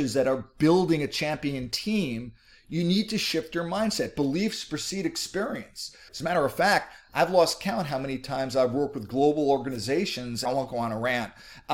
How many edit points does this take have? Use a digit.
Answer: 2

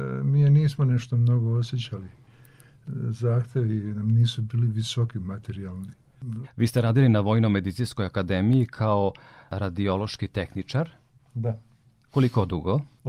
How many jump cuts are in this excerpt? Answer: 1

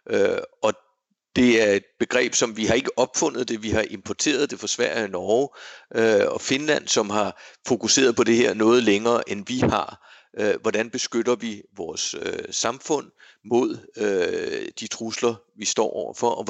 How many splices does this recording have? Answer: 0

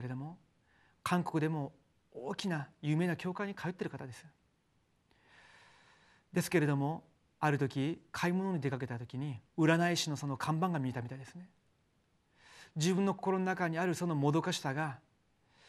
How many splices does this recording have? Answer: 1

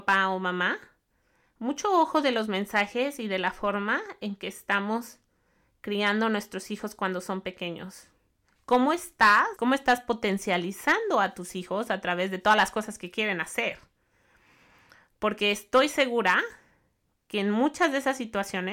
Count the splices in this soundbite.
1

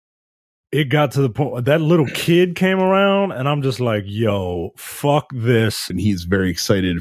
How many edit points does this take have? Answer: 1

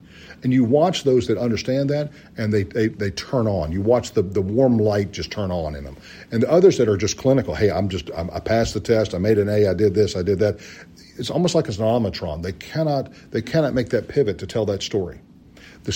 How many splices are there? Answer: 1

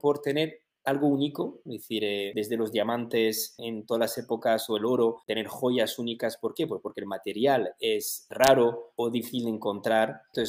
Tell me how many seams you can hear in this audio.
1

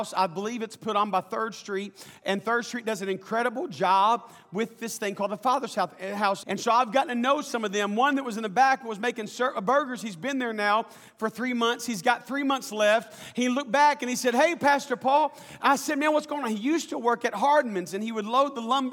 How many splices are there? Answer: 1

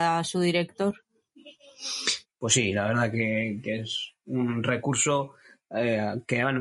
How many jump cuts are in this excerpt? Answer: 1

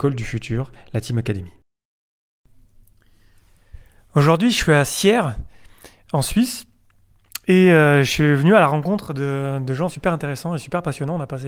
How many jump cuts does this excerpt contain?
1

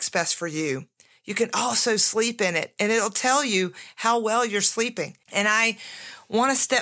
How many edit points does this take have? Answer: 1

